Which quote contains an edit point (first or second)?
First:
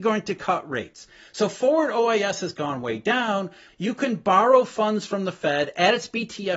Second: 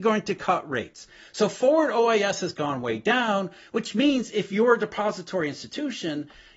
first